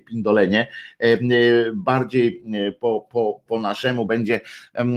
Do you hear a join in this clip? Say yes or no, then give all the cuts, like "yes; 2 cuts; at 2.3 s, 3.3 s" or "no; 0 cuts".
yes; 1 cut; at 3.5 s